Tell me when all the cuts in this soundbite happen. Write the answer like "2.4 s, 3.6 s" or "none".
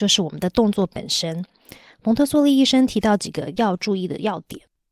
none